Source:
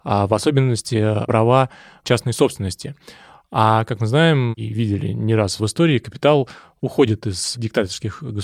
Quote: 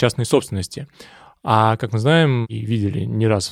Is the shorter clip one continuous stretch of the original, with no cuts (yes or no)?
yes